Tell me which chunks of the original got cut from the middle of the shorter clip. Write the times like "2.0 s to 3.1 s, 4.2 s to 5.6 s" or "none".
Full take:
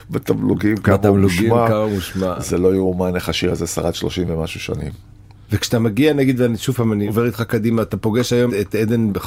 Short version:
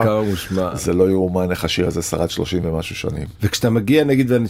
5.0 s to 5.4 s